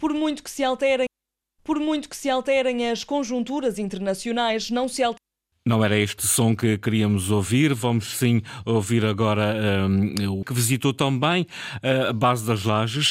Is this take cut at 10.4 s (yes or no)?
yes